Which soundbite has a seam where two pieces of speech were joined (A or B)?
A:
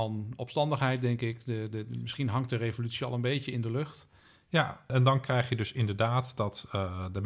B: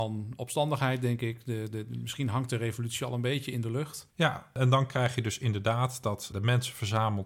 B